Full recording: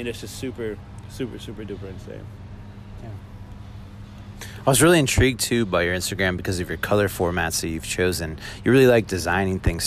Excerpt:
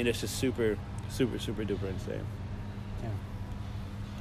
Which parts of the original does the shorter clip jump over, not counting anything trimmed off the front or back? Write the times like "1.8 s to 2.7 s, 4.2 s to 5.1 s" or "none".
none